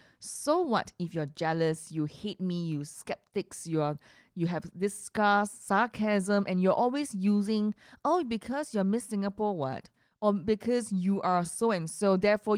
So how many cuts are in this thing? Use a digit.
0